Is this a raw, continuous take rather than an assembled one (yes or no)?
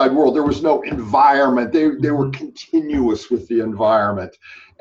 yes